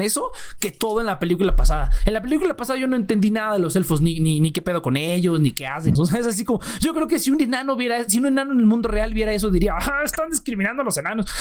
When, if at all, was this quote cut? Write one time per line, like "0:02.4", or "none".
0:06.0